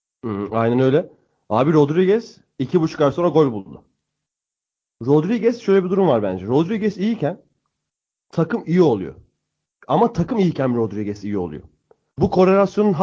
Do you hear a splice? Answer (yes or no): no